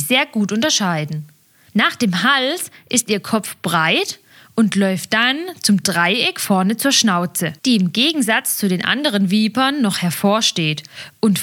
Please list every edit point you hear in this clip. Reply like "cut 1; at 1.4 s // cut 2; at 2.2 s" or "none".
cut 1; at 1.7 s // cut 2; at 7.6 s